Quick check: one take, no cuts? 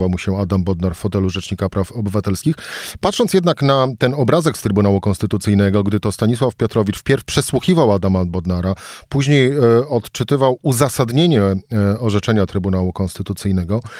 yes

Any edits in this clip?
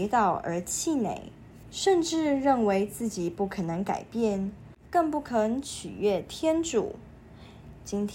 yes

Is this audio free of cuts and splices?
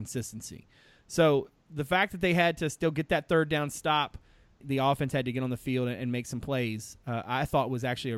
no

